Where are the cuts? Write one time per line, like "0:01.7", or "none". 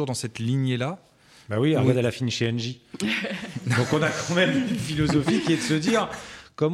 none